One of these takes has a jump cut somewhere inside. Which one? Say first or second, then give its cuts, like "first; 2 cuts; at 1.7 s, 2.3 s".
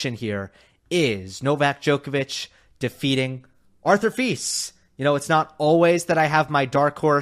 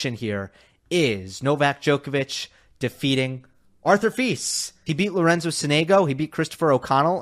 second; 1 cut; at 4.9 s